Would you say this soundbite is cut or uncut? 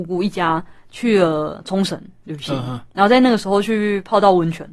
uncut